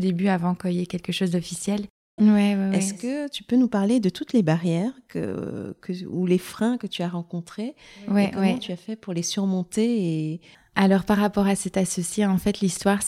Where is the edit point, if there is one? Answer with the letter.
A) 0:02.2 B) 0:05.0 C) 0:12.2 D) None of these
A